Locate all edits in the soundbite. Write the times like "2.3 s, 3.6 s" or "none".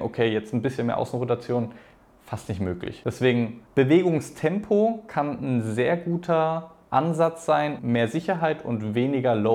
3.7 s, 7.8 s